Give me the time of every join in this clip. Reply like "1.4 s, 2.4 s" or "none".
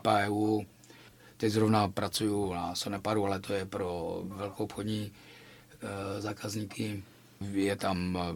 none